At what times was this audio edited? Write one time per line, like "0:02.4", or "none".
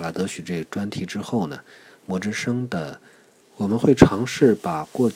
0:03.4

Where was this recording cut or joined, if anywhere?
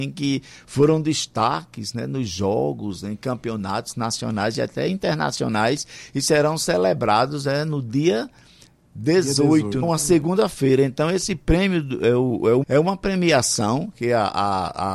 0:09.8
0:12.6

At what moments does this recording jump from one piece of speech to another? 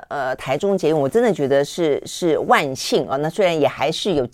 none

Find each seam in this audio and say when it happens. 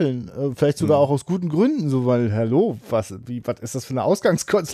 none

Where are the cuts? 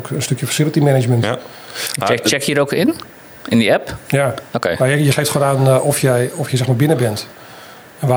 none

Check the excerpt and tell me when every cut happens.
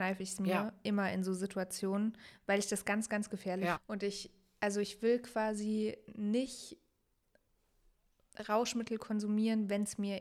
0:03.8

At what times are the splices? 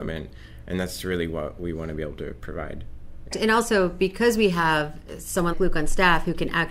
0:03.3
0:05.5

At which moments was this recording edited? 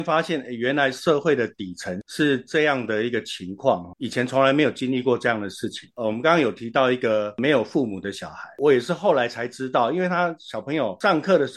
none

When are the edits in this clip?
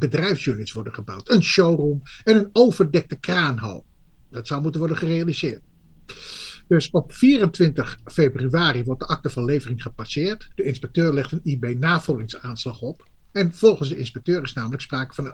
0:10.5

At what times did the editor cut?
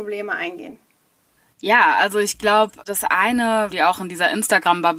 0:03.7

